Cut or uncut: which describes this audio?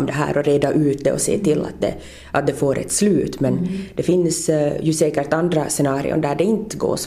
uncut